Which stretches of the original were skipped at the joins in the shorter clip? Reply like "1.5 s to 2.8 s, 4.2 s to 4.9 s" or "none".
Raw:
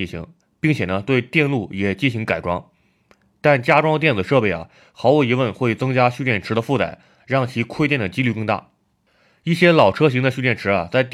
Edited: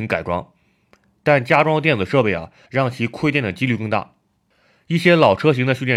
4.8 s to 7.2 s